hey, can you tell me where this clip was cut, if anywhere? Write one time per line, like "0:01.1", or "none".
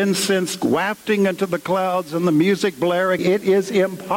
0:03.2